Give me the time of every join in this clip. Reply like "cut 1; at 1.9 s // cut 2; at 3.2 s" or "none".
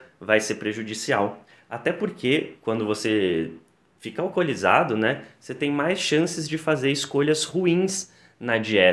none